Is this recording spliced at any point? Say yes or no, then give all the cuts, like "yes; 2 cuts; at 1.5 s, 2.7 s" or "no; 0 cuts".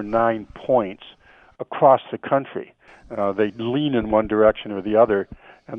yes; 1 cut; at 2.9 s